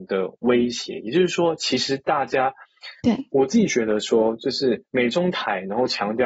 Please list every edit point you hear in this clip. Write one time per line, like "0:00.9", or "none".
0:03.0